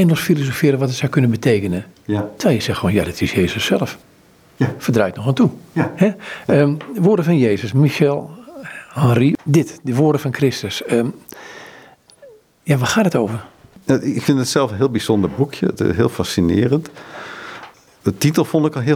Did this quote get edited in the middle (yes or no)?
no